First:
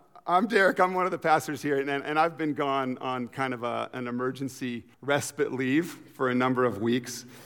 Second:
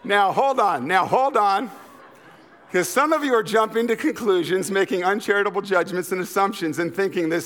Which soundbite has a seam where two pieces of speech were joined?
first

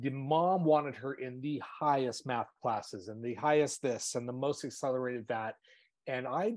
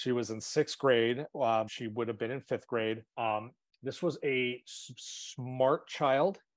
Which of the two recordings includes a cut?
second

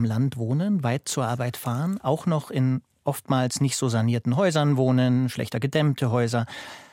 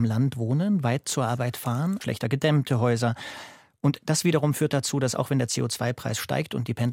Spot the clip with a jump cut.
second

